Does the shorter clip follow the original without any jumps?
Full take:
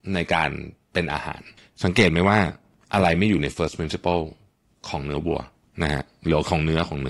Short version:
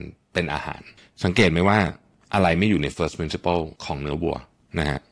no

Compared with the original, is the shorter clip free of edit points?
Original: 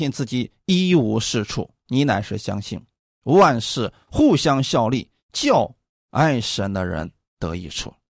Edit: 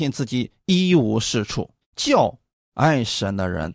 no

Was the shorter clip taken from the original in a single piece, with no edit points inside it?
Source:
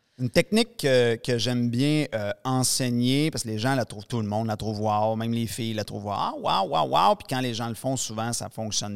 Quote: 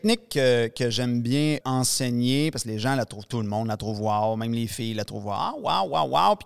no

